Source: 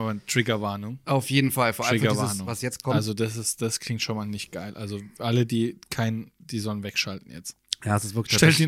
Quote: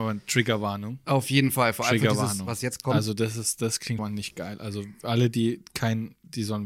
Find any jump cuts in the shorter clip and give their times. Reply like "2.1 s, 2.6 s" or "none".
4.0 s